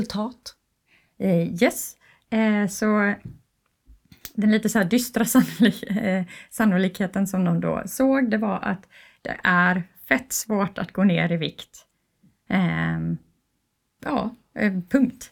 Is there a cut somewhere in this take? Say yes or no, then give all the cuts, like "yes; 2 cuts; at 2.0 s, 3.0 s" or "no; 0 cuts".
no; 0 cuts